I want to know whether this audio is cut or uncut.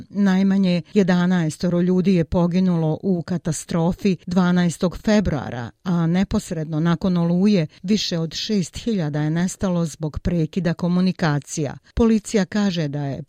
uncut